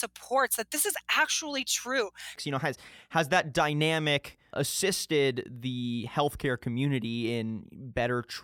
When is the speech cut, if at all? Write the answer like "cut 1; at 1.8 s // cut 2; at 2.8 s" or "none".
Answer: cut 1; at 2.4 s // cut 2; at 4.5 s